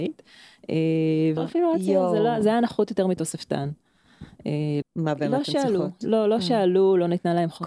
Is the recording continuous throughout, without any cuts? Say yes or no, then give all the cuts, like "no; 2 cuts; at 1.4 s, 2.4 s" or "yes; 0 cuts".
no; 2 cuts; at 1.4 s, 4.8 s